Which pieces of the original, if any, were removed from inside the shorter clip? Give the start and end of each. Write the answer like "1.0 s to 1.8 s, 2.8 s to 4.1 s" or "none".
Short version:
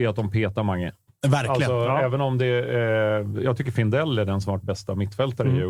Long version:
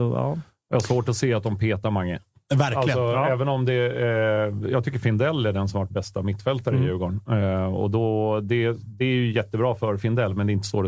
none